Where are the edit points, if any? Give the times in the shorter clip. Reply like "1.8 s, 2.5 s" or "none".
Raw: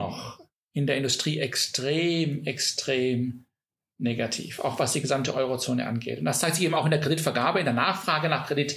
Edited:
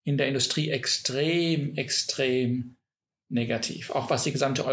none